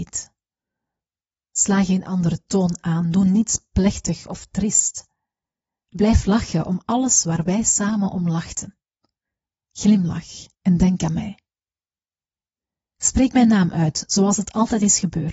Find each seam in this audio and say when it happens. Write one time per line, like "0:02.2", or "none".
0:10.5